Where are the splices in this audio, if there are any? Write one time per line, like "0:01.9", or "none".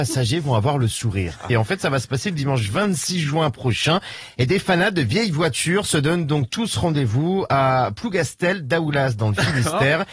0:01.5